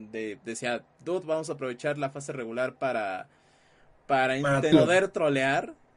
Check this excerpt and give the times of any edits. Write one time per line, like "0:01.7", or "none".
0:04.7